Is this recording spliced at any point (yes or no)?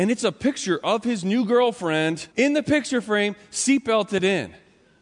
yes